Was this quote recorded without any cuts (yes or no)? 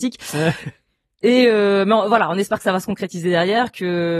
yes